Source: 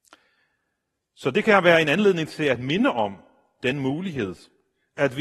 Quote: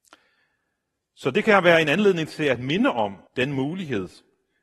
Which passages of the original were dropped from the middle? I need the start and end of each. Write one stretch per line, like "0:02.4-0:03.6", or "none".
0:03.3-0:03.5